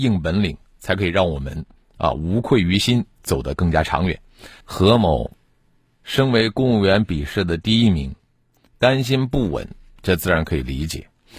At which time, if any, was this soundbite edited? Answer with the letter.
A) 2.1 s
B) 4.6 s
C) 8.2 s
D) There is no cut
B